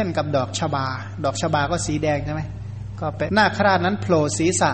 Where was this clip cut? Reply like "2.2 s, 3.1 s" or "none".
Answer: 3.3 s